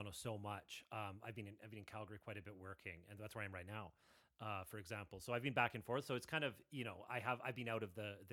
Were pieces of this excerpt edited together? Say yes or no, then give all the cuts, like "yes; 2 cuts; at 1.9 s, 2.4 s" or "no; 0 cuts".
no; 0 cuts